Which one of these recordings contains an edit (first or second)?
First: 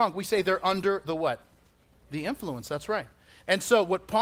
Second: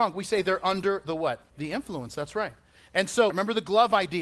second